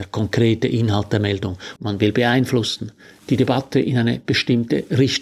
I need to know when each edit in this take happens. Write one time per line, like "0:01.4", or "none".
0:01.8